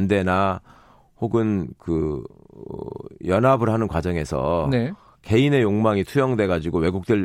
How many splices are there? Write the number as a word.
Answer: zero